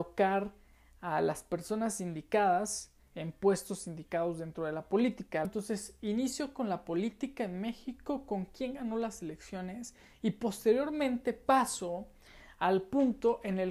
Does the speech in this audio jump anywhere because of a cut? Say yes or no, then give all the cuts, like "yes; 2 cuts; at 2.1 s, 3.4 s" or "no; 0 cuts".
yes; 1 cut; at 5.4 s